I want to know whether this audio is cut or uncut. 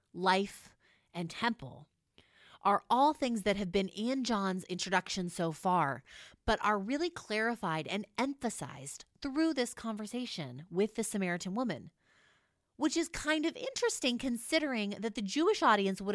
uncut